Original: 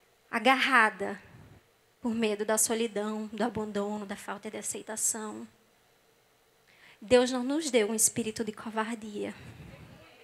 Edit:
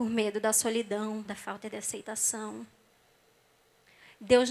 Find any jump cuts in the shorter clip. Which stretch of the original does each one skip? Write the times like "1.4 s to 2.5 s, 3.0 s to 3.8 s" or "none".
3.3 s to 4.1 s